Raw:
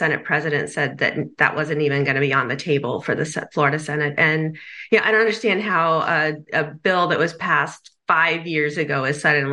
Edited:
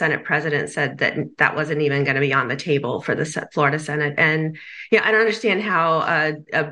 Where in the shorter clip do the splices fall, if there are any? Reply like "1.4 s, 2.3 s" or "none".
none